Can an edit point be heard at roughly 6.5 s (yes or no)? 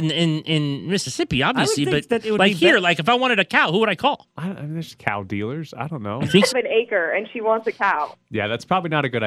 yes